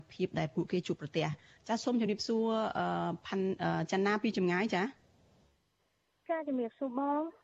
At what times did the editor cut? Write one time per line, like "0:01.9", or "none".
none